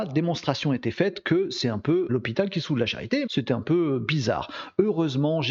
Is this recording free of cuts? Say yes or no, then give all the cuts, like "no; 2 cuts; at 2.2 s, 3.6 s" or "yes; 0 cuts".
no; 2 cuts; at 2.1 s, 3.3 s